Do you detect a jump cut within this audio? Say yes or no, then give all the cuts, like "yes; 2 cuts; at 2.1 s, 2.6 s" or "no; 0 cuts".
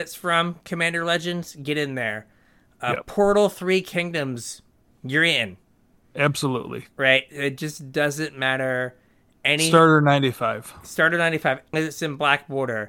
yes; 1 cut; at 11.7 s